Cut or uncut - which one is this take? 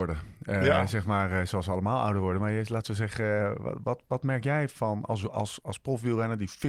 uncut